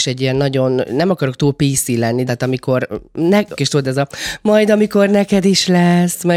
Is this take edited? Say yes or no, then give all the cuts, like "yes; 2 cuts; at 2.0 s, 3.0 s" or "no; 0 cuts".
yes; 2 cuts; at 2.3 s, 3.6 s